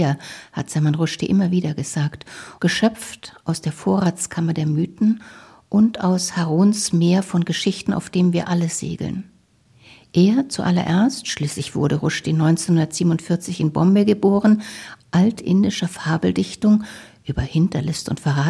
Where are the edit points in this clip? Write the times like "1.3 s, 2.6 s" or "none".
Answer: 2.6 s, 15.0 s